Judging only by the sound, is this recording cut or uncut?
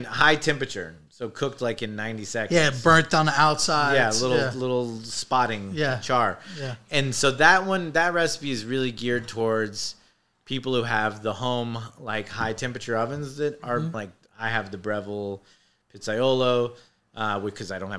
cut